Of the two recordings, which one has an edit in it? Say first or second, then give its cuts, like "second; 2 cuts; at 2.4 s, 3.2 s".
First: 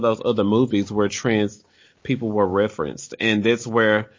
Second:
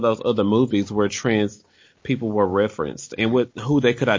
second; 1 cut; at 3.2 s